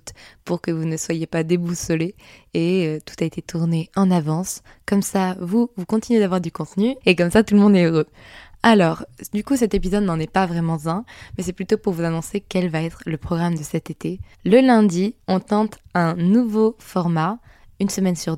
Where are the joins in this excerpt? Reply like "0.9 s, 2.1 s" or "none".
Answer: 7.0 s, 14.3 s